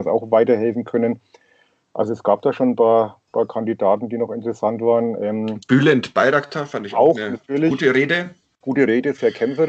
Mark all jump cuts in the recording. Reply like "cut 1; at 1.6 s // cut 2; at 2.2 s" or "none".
none